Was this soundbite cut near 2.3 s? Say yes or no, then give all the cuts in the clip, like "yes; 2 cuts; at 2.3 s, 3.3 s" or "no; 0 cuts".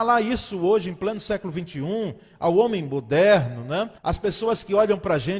no; 1 cut; at 4.0 s